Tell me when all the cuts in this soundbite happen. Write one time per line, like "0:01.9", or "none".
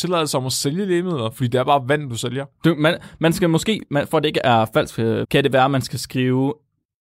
0:05.2